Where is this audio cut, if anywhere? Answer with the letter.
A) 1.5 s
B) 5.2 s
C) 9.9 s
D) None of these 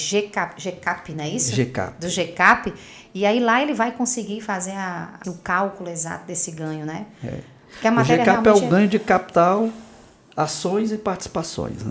B